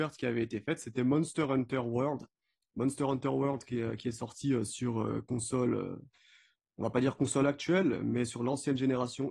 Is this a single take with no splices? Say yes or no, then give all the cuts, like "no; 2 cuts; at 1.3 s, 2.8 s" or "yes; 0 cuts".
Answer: yes; 0 cuts